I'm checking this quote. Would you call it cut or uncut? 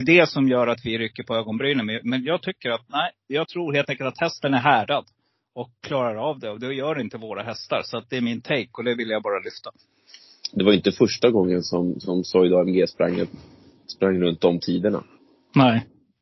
uncut